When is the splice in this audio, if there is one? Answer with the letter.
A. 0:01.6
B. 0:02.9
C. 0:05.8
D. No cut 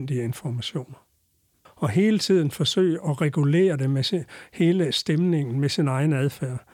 A